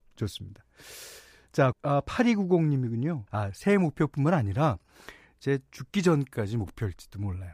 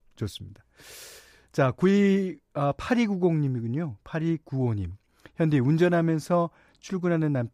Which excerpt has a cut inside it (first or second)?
first